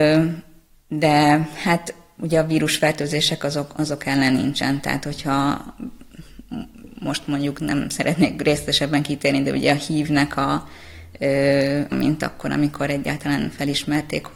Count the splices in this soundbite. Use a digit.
1